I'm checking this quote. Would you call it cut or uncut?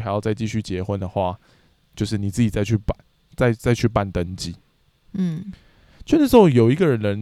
uncut